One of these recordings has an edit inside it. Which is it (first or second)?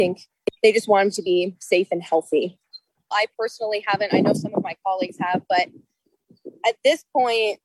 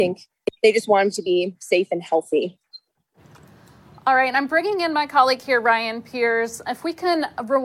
first